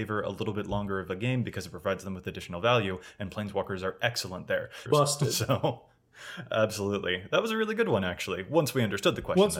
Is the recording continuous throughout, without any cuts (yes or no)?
no